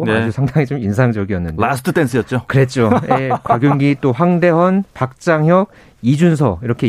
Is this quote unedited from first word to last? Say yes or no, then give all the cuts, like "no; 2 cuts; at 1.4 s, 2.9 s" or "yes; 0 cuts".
yes; 0 cuts